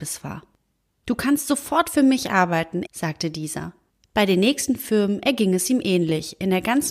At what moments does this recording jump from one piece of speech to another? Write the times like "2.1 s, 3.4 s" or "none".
2.9 s